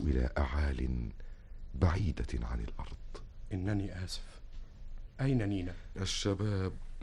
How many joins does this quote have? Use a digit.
1